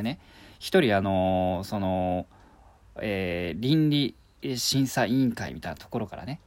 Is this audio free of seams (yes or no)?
yes